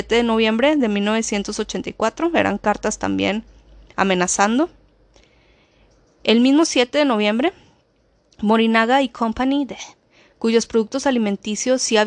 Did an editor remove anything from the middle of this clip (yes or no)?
no